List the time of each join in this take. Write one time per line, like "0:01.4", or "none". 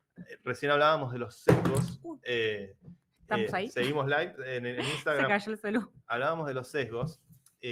none